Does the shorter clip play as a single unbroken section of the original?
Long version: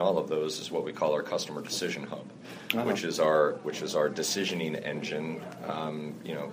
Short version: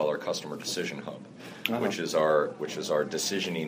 yes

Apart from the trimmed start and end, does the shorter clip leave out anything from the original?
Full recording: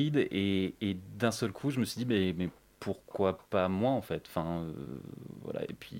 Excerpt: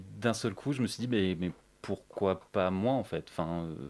no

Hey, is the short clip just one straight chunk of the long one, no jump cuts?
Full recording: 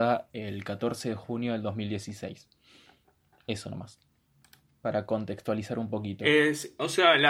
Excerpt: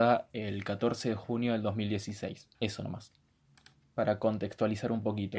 no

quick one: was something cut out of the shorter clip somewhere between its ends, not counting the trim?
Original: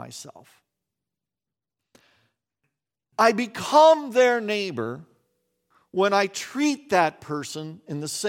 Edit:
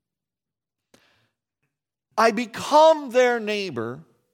no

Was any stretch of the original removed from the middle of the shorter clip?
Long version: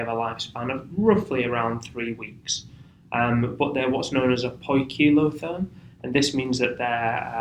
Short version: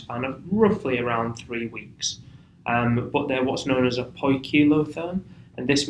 no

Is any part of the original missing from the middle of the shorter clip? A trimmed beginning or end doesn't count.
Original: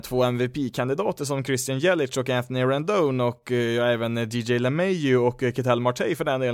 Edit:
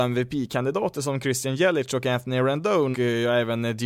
yes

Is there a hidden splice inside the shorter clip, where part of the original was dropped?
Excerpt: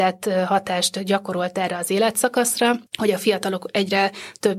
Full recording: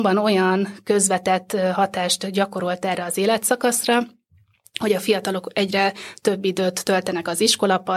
yes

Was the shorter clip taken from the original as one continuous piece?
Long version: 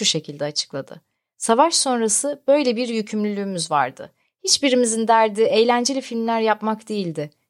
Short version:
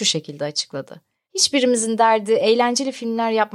no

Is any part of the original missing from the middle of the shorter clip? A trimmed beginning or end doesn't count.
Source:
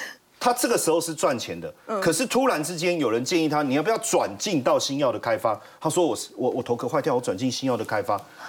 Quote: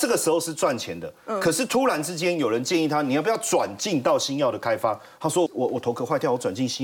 yes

